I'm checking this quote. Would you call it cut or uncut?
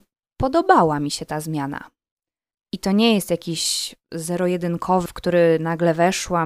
cut